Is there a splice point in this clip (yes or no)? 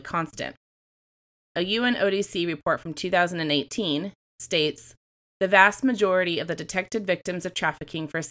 yes